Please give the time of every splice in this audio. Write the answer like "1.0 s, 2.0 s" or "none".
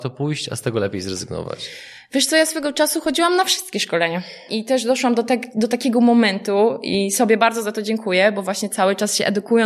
4.5 s